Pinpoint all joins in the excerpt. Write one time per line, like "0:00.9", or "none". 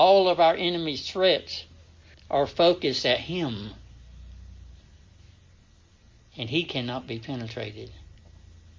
0:02.1